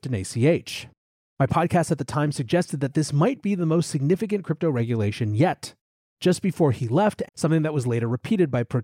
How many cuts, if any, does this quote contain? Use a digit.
2